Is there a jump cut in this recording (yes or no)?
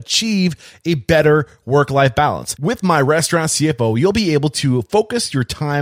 no